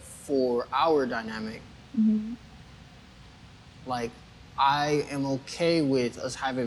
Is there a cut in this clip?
no; 0 cuts

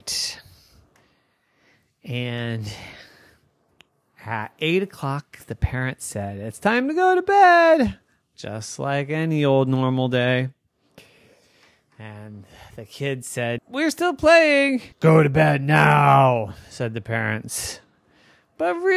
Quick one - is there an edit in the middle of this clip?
yes; 2 cuts; at 13.6 s, 14.9 s

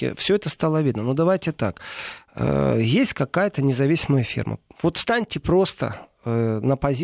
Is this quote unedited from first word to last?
yes; 0 cuts

